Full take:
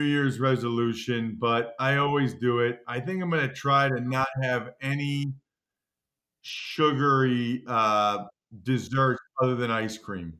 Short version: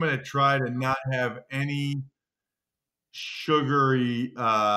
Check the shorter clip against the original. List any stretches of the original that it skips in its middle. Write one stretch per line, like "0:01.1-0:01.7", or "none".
none